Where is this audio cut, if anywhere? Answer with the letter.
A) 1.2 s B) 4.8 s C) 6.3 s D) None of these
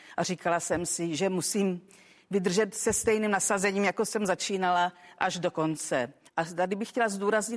C